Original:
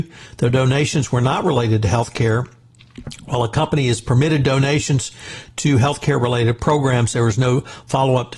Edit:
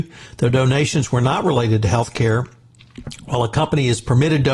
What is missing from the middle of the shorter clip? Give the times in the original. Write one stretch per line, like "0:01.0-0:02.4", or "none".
none